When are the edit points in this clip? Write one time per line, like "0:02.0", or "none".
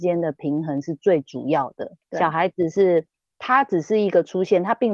0:02.0